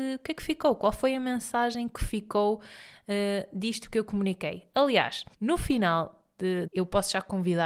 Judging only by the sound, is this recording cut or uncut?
cut